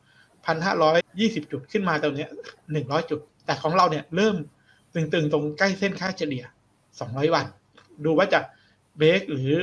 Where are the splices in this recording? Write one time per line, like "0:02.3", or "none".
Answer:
0:01.0